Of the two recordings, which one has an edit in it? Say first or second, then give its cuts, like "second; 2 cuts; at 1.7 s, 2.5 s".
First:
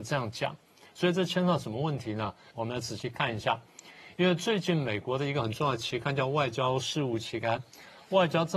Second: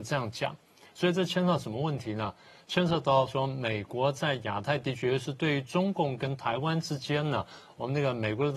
first; 2 cuts; at 2.5 s, 7.6 s